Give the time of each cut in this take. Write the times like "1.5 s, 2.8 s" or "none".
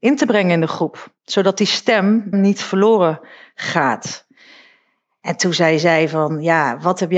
2.3 s